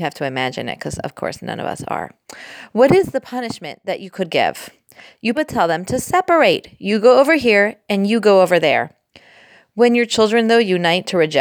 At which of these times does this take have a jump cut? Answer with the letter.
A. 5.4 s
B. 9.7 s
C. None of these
A